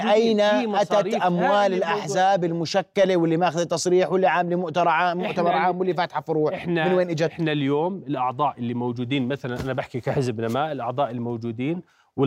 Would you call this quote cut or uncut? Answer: uncut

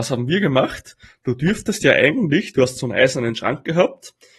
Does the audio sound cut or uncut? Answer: uncut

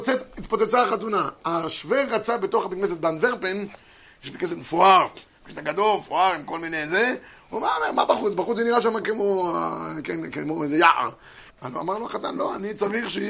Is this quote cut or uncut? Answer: cut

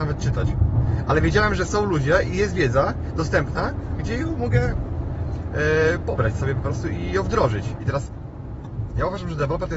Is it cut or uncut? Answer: cut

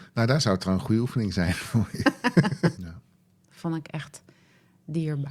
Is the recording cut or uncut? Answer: cut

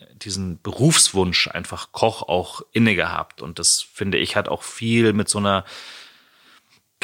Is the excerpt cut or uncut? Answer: uncut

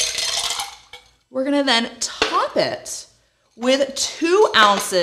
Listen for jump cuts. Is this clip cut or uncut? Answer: uncut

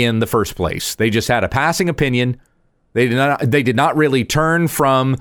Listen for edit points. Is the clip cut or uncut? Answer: uncut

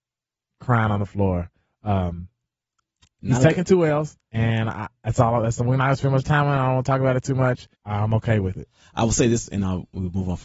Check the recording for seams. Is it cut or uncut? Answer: cut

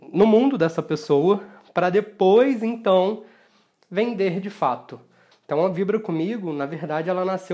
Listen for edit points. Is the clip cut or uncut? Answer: cut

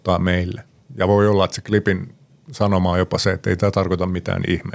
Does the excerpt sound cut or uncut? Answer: uncut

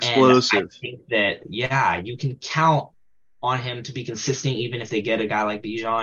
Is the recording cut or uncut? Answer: uncut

